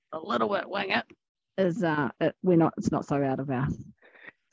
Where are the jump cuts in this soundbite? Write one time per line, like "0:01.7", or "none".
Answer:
none